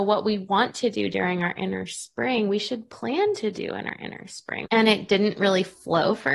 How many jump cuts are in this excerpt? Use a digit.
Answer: 1